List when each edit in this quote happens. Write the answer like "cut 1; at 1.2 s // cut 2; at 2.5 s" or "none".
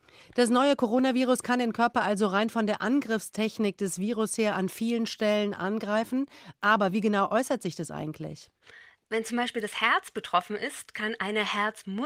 none